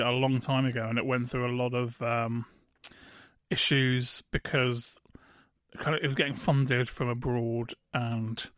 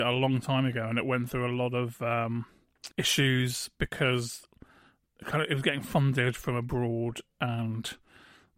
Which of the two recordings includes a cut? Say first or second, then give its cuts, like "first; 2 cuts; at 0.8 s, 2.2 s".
second; 1 cut; at 2.9 s